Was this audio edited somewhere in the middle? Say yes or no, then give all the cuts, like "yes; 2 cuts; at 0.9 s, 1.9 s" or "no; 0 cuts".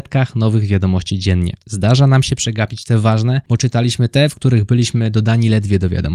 no; 0 cuts